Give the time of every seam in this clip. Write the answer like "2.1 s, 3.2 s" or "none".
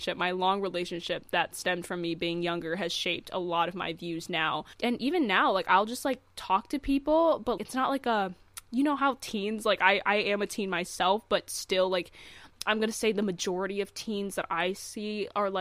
7.6 s